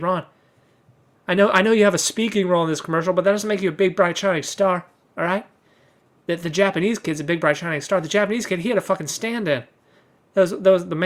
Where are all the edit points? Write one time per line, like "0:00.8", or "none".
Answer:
0:01.1